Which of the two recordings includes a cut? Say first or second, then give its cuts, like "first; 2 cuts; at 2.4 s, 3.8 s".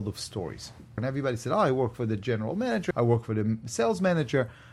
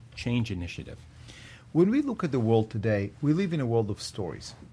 first; 2 cuts; at 1.0 s, 2.9 s